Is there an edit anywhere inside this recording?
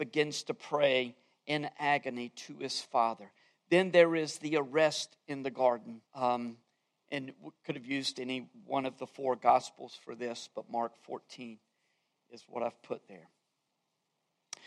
yes; 1 cut; at 6.1 s

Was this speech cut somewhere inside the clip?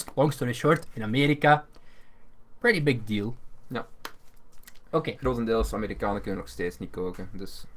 no; 0 cuts

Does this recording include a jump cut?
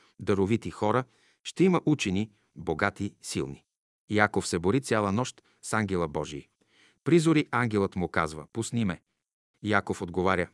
no; 0 cuts

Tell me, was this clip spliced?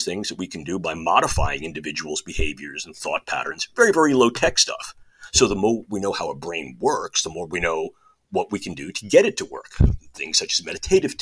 no; 0 cuts

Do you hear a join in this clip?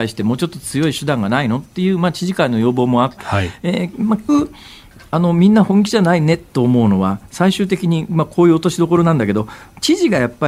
yes; 2 cuts; at 3.2 s, 4.3 s

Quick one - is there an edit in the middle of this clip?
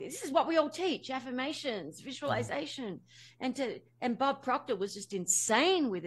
no; 0 cuts

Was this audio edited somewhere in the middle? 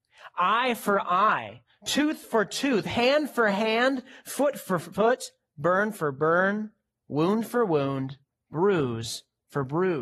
no; 0 cuts

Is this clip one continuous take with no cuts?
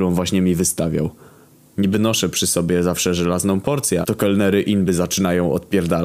no; 2 cuts; at 1.7 s, 4.0 s

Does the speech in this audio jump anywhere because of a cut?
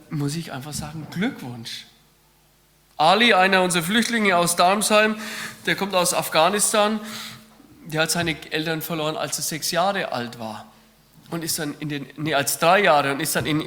no; 0 cuts

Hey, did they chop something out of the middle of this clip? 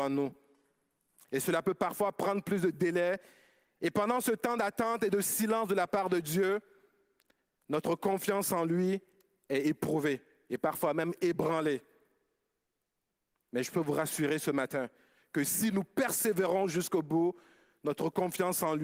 no; 0 cuts

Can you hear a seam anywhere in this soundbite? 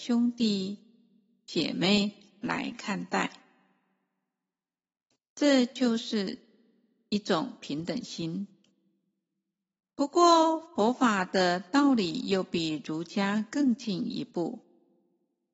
no; 0 cuts

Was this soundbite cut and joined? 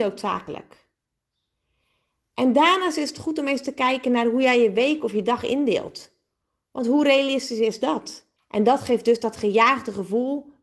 yes; 1 cut; at 8.4 s

